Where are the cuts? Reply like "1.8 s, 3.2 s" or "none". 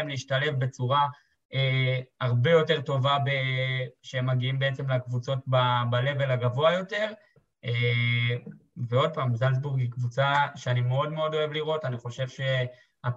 none